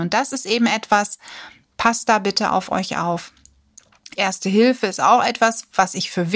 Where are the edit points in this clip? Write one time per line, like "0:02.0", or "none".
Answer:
0:04.1

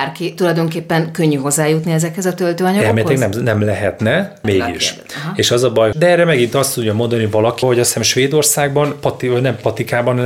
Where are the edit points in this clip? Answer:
0:04.4
0:05.9
0:07.6

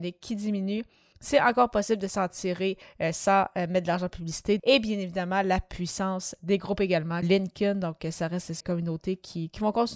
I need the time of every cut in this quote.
0:04.6
0:07.2
0:08.6

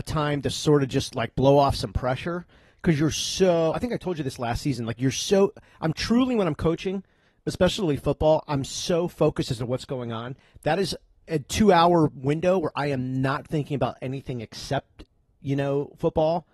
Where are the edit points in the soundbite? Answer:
none

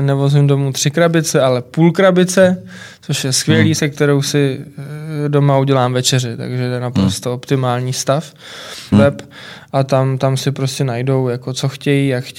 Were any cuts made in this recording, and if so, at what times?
0:08.9

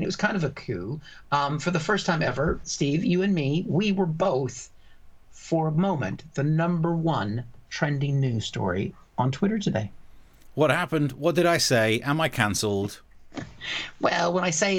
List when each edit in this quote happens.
0:02.6

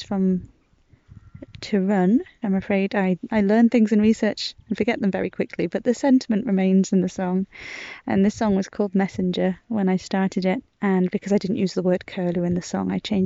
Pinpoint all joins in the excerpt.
0:02.4

